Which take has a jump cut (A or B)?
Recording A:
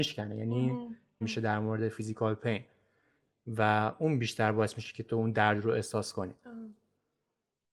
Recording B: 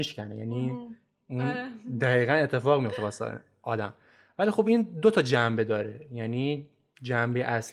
A